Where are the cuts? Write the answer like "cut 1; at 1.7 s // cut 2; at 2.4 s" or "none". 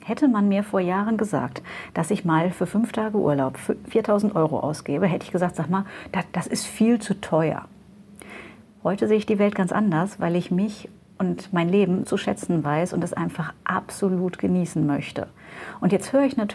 cut 1; at 6.3 s // cut 2; at 12.0 s